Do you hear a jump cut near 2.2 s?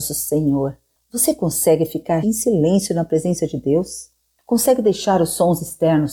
yes; 1 cut; at 2.2 s

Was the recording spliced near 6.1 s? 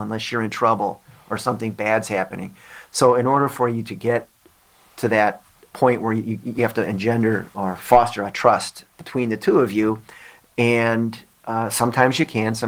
no; 0 cuts

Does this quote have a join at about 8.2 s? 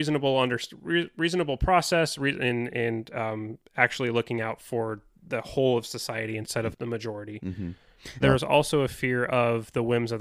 yes; 1 cut; at 8.2 s

